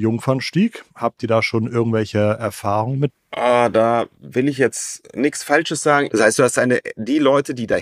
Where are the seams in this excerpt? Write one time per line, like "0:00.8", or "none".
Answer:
0:03.1
0:06.1